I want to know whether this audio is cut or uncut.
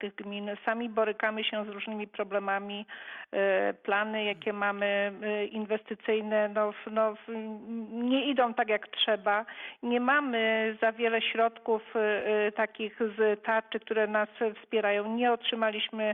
uncut